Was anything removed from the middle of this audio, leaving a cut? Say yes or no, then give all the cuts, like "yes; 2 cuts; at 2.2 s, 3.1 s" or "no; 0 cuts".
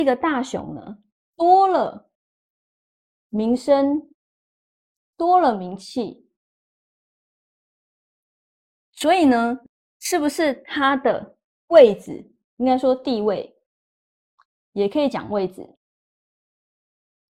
no; 0 cuts